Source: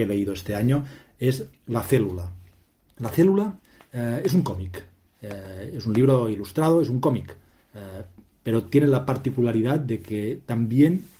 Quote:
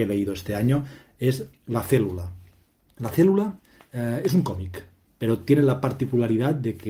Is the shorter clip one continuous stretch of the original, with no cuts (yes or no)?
no